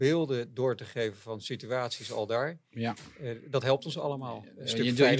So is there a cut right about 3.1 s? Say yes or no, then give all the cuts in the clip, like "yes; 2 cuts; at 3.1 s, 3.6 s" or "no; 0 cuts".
no; 0 cuts